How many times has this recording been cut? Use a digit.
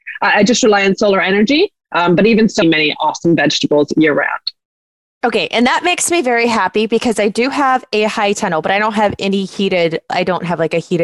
1